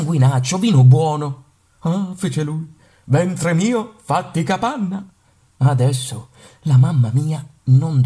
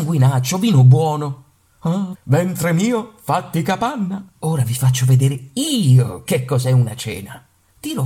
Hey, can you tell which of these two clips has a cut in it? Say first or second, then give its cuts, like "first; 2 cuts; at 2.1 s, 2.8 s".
second; 2 cuts; at 2.1 s, 4.4 s